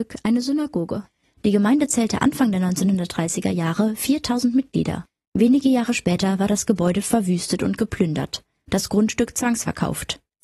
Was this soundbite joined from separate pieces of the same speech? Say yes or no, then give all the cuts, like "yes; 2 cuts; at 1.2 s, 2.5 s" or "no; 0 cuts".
no; 0 cuts